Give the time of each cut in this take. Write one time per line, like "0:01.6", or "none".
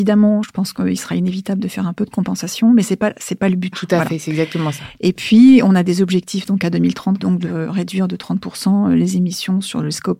0:03.7
0:07.2

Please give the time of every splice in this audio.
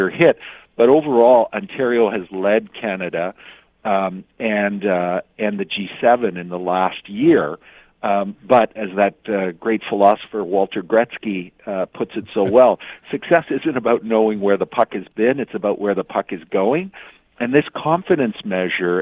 none

